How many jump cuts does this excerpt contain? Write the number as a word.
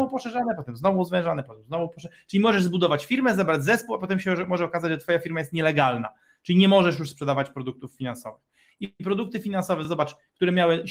zero